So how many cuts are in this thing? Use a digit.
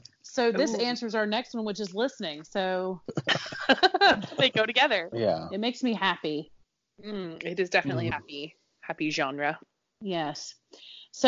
2